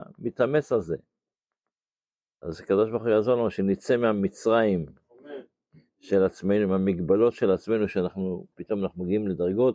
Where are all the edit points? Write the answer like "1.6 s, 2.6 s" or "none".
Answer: 8.5 s